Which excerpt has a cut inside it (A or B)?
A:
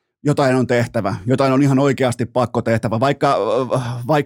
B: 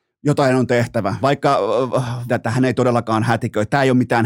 B